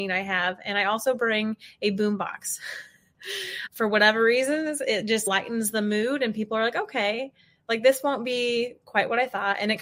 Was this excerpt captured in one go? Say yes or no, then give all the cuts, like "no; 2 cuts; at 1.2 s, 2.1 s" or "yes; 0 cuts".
yes; 0 cuts